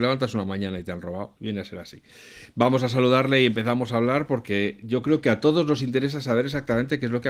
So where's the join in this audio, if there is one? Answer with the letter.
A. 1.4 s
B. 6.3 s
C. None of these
A